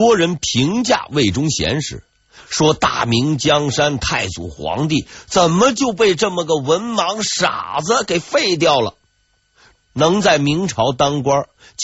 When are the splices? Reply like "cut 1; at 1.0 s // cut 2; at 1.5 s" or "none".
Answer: cut 1; at 2.4 s // cut 2; at 9.7 s

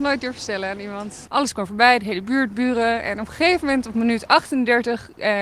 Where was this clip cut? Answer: cut 1; at 1.3 s

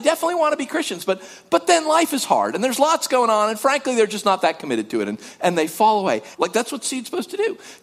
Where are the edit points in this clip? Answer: cut 1; at 6.3 s

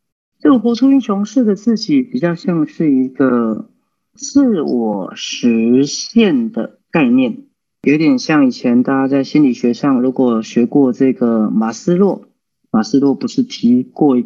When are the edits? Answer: none

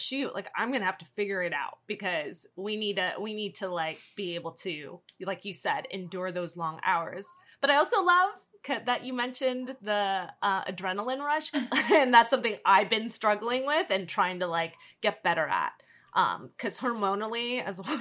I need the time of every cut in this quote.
cut 1; at 11.5 s

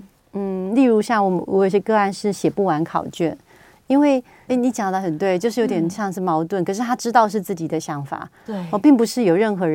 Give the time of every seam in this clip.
cut 1; at 4.5 s

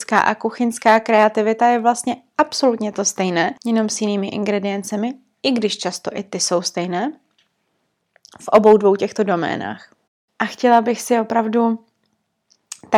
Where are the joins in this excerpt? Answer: cut 1; at 3.6 s

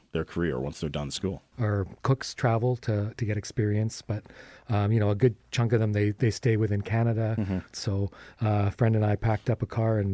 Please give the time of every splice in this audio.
cut 1; at 1.5 s // cut 2; at 7.7 s

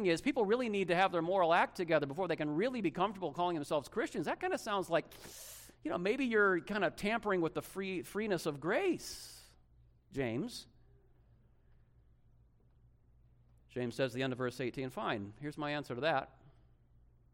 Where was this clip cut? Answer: none

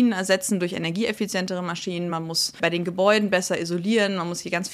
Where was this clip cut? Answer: none

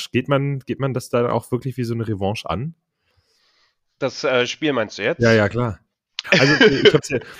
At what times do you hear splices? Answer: cut 1; at 6.2 s

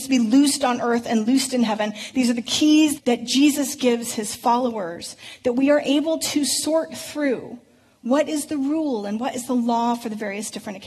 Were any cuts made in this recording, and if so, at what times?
cut 1; at 3.0 s

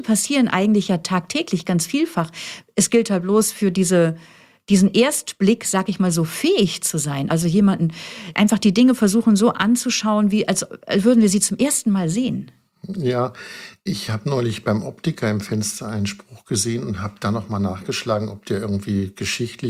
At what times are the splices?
none

